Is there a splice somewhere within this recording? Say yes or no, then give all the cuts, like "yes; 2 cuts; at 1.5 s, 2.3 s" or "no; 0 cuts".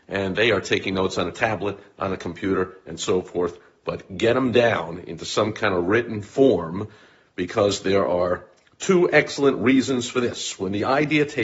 no; 0 cuts